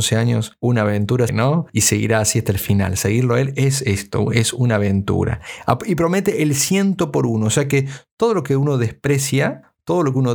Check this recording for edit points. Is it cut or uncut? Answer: cut